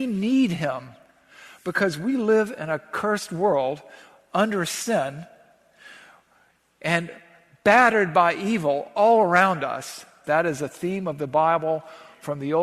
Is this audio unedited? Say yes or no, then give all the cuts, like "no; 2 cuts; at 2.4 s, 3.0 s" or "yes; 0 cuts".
no; 1 cut; at 10.2 s